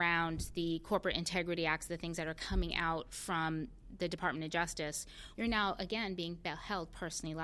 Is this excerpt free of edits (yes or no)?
no